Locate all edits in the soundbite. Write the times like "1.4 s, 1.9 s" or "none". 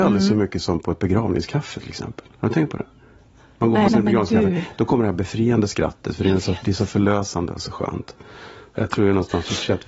3.9 s, 8.7 s